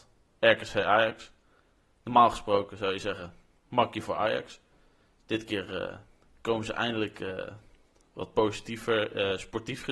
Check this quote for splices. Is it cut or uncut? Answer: uncut